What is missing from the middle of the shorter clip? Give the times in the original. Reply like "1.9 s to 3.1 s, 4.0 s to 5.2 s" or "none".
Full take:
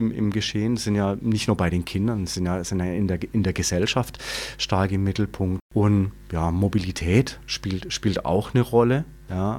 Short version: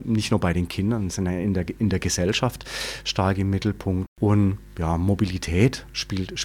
2.3 s to 2.6 s